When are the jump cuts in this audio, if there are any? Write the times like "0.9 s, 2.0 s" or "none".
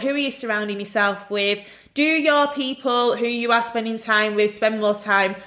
none